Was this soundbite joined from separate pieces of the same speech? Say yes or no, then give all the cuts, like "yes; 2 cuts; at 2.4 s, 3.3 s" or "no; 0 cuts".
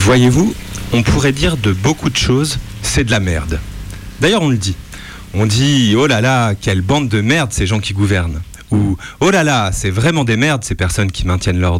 no; 0 cuts